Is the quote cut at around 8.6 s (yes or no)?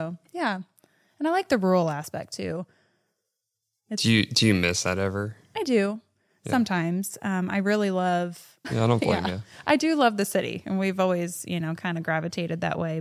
yes